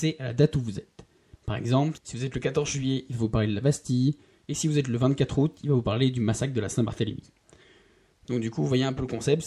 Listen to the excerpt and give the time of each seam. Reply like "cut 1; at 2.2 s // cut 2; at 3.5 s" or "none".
none